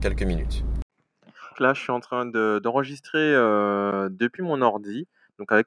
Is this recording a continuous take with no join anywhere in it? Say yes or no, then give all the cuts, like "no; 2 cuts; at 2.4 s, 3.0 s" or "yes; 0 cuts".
no; 1 cut; at 1.5 s